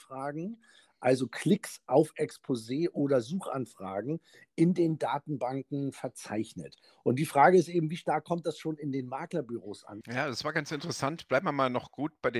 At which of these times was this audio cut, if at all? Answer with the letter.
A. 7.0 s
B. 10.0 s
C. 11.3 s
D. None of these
B